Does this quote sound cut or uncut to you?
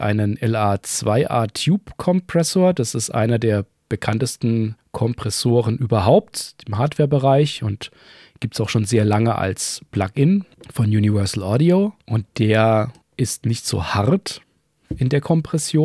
uncut